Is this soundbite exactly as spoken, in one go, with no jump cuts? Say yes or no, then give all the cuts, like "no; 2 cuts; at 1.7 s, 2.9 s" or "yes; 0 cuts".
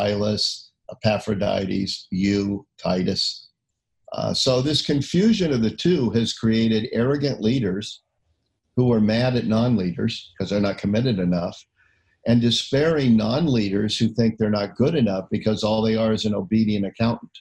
yes; 0 cuts